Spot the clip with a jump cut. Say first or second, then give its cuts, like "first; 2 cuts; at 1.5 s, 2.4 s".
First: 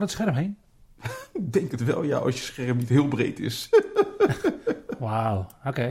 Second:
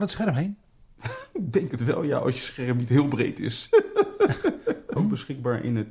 second; 1 cut; at 5.0 s